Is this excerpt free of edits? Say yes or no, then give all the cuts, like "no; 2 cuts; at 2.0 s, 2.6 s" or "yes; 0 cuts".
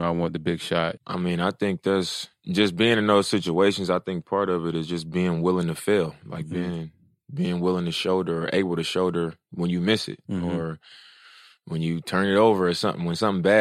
no; 1 cut; at 1.0 s